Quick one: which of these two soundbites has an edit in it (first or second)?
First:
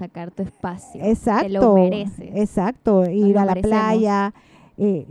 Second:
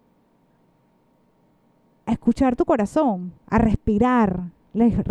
second